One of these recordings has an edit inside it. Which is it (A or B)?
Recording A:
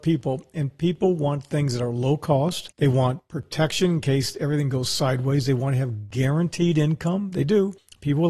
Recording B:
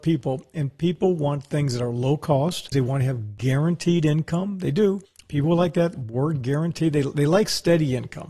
B